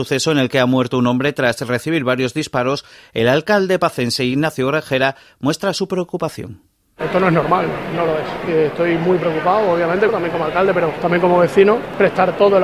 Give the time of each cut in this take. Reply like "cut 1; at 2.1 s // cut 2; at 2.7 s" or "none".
cut 1; at 8.5 s // cut 2; at 10.1 s